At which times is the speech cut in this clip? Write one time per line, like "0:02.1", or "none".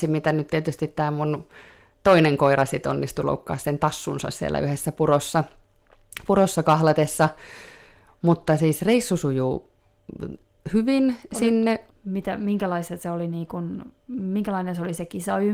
0:11.9